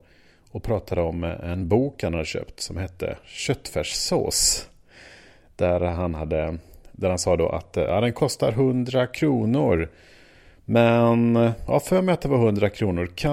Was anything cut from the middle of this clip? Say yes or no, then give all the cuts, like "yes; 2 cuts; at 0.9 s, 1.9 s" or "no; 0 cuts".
no; 0 cuts